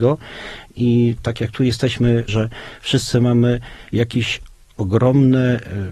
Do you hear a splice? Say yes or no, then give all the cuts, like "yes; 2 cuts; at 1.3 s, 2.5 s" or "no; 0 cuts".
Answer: yes; 1 cut; at 2.3 s